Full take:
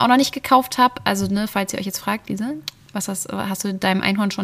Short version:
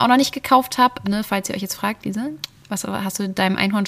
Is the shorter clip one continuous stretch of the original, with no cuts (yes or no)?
no